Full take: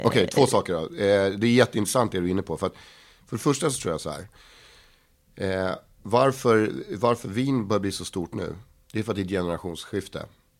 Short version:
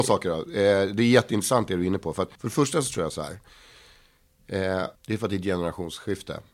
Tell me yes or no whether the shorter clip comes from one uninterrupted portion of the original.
no